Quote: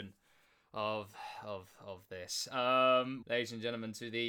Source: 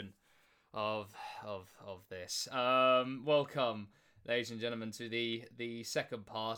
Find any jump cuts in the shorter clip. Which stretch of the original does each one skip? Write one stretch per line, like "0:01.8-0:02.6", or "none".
0:03.2-0:04.2